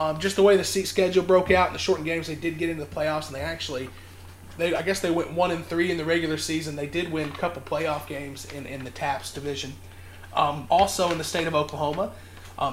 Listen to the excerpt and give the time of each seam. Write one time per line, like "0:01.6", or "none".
0:10.7